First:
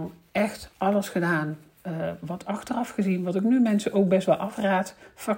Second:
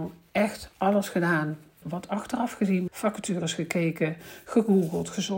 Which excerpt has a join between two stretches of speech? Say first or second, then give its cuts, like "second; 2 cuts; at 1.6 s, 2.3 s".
second; 2 cuts; at 1.8 s, 2.9 s